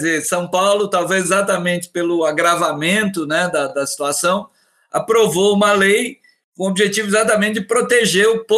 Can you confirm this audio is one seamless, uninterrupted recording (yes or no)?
yes